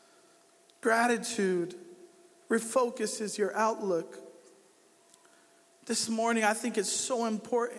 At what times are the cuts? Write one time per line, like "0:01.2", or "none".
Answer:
none